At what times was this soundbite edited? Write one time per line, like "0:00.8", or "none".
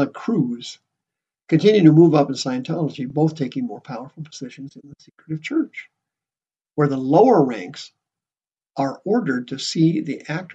none